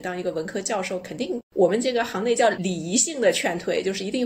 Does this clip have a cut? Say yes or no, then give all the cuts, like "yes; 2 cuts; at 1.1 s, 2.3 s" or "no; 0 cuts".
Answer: no; 0 cuts